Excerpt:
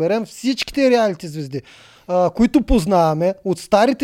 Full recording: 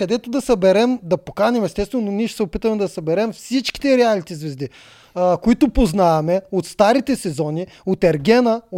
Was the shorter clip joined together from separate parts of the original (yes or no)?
no